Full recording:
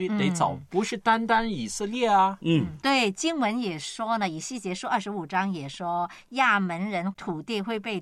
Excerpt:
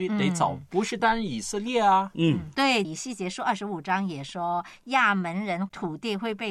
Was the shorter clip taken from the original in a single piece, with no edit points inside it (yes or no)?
no